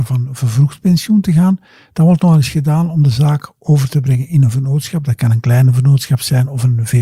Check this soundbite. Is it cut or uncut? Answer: uncut